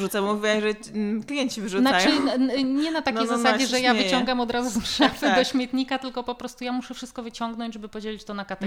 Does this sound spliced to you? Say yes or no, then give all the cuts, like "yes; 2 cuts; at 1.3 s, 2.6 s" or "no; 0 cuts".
no; 0 cuts